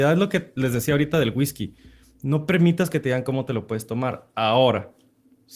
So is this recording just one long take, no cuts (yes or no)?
yes